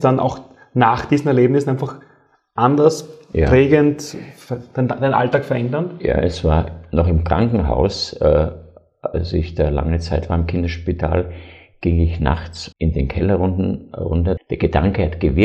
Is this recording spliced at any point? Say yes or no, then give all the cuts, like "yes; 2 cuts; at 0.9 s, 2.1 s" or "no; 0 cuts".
yes; 2 cuts; at 12.7 s, 14.4 s